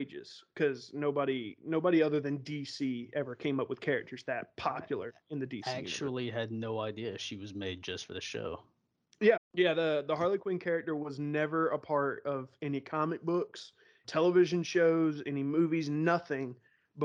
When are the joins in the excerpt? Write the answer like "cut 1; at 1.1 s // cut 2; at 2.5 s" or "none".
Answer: cut 1; at 9.4 s // cut 2; at 14.0 s